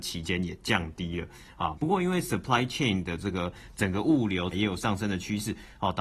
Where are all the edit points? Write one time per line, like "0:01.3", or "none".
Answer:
0:01.7
0:04.5